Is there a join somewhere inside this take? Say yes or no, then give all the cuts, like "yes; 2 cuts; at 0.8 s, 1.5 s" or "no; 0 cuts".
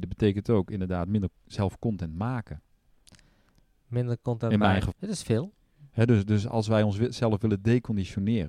yes; 1 cut; at 4.9 s